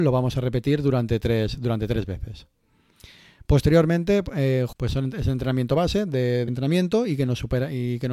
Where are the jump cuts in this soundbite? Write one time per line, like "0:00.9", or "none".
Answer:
0:04.7
0:06.5